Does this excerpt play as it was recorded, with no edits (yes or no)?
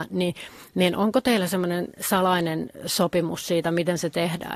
yes